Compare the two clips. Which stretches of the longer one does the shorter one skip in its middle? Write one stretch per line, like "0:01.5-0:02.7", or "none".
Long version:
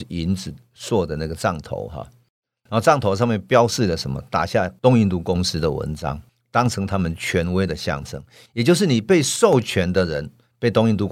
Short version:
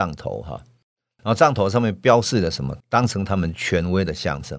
0:04.3-0:06.4